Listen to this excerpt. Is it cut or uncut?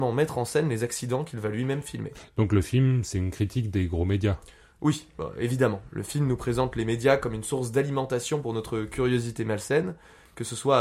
uncut